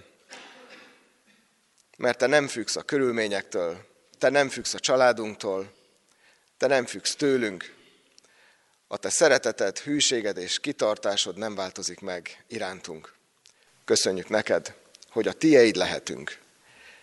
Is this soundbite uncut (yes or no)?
yes